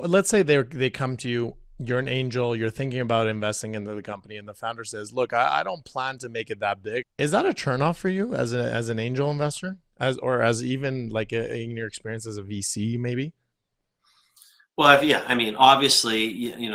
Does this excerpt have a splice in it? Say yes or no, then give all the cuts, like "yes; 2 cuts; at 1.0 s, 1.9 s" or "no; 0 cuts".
yes; 1 cut; at 7.0 s